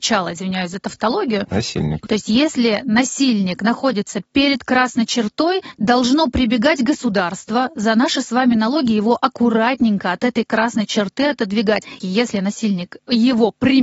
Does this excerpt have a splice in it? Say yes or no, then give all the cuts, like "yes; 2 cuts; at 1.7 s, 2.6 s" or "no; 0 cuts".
yes; 2 cuts; at 2.1 s, 12.0 s